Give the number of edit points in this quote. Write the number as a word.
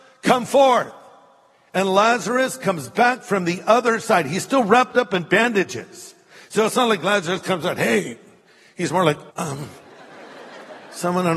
one